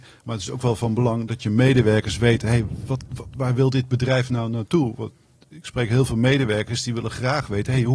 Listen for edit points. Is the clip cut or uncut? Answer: uncut